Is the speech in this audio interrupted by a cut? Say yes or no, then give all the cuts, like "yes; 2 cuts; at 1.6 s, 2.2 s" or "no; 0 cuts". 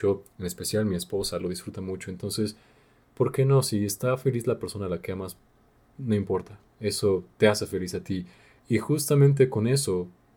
no; 0 cuts